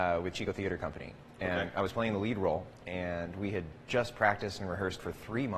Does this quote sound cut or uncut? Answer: uncut